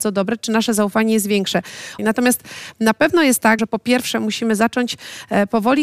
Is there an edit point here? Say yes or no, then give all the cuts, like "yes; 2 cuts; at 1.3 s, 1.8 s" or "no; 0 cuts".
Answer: yes; 2 cuts; at 2.0 s, 3.6 s